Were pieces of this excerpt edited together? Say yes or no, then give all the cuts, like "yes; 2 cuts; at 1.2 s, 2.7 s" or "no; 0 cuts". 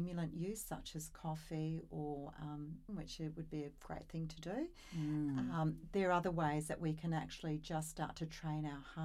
yes; 1 cut; at 2.9 s